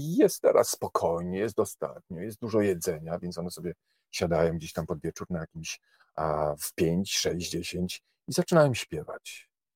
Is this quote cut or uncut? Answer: uncut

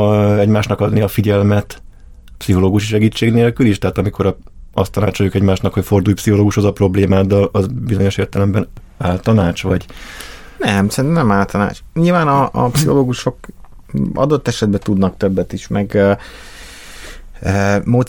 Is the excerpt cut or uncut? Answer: uncut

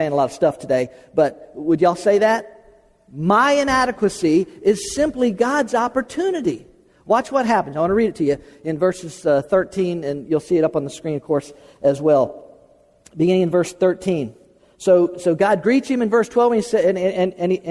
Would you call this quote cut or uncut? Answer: uncut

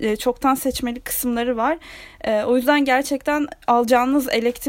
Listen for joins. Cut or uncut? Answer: uncut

